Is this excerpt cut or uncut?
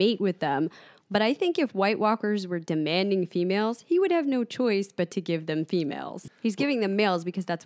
cut